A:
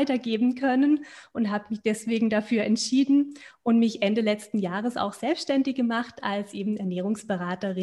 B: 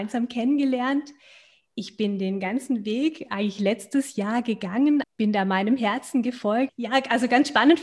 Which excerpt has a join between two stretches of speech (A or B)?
B